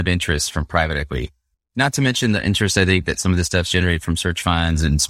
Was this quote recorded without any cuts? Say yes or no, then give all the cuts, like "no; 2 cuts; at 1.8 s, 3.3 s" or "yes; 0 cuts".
yes; 0 cuts